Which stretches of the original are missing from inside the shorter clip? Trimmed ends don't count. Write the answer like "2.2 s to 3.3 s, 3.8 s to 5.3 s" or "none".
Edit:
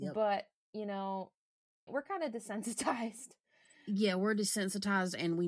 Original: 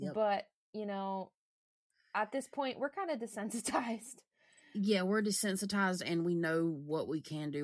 1.9 s to 2.7 s